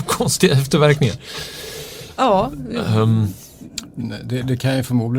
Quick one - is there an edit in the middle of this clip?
no; 0 cuts

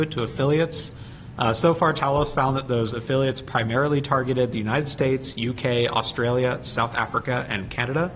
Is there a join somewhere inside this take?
no; 0 cuts

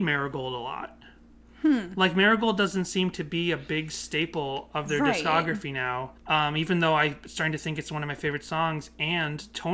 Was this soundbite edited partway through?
yes; 1 cut; at 6.2 s

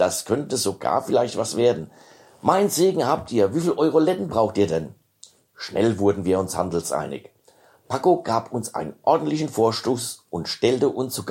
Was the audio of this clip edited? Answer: no; 0 cuts

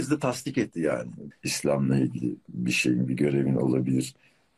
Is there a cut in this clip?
yes; 1 cut; at 1.3 s

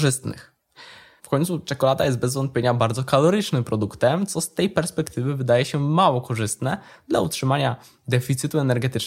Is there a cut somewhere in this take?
yes; 1 cut; at 1.2 s

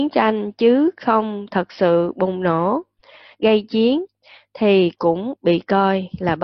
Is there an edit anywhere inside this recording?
no; 0 cuts

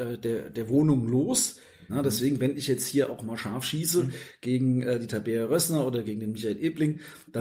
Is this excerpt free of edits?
no; 1 cut; at 1.9 s

